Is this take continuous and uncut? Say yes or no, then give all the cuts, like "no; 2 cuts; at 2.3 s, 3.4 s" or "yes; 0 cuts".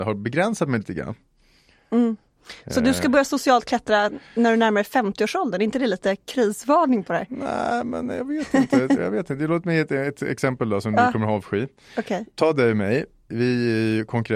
no; 1 cut; at 9.0 s